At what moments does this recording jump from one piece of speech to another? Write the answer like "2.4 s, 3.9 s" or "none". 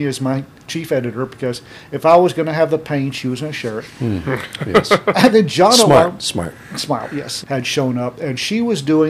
7.4 s